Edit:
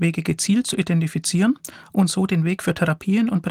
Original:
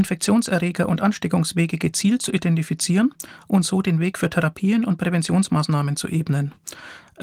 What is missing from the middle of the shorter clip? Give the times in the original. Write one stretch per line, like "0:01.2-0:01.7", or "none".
none